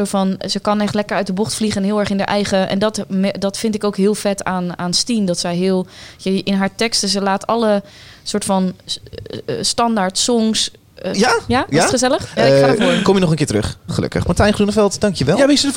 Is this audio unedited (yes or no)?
no